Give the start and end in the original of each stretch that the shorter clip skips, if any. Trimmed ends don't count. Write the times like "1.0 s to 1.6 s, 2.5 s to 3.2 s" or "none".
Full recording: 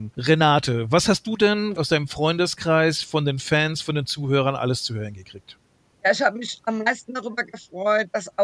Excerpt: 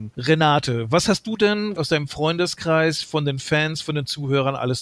none